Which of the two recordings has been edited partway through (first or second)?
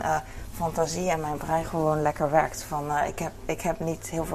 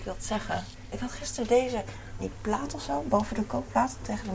second